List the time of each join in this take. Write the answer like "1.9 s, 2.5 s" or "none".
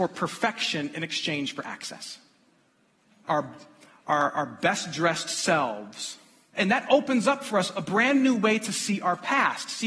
3.2 s, 6.5 s